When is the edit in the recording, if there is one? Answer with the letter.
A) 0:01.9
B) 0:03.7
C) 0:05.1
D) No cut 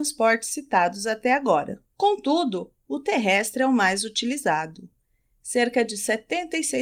A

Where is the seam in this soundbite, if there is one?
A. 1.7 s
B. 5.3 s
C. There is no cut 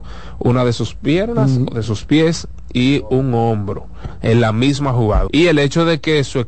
B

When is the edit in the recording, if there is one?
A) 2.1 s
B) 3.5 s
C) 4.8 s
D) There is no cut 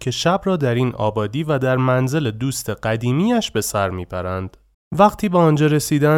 D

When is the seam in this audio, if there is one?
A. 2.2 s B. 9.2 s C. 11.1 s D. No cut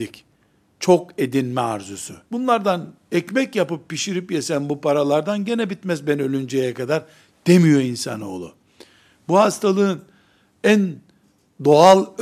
A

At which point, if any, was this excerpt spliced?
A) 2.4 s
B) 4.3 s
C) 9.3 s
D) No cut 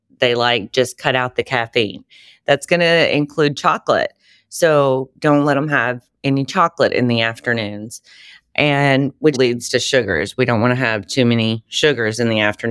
C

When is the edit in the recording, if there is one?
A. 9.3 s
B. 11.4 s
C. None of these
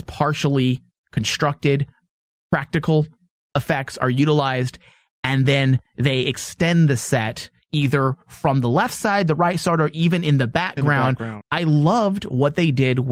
B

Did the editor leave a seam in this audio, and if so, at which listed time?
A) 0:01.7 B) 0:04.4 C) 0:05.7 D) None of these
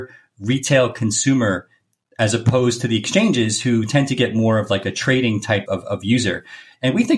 C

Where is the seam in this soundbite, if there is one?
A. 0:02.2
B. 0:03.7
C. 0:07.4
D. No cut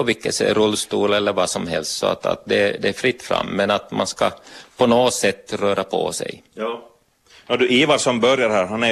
D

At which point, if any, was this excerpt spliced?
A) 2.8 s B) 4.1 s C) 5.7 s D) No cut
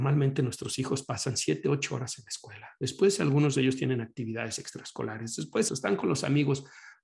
C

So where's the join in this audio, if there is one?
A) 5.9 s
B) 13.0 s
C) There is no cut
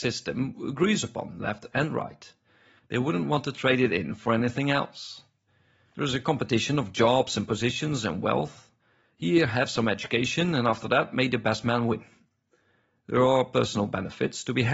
A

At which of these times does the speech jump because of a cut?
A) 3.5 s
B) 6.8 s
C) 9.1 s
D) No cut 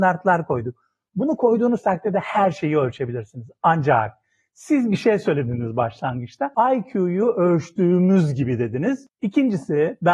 C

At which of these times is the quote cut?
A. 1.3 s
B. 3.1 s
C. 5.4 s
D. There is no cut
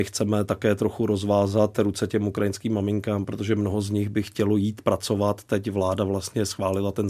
D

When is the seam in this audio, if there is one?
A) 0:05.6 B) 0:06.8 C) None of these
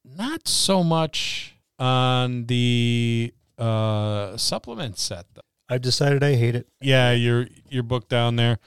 B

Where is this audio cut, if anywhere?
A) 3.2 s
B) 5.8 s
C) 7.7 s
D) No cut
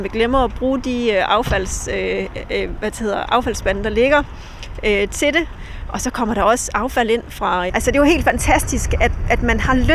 C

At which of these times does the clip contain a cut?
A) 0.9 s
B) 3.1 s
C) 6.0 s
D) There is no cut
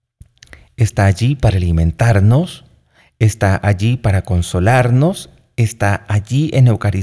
D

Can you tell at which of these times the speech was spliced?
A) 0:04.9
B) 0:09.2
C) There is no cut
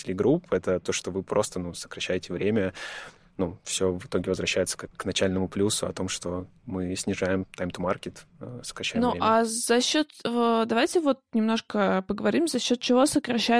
A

